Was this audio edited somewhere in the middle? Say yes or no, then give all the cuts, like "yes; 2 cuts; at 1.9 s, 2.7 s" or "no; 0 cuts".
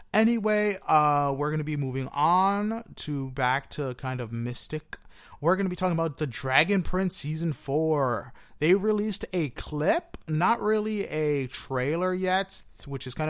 no; 0 cuts